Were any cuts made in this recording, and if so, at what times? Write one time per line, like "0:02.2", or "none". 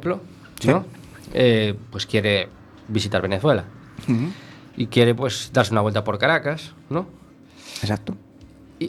none